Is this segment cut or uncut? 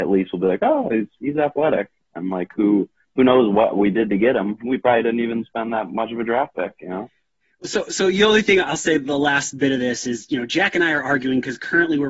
uncut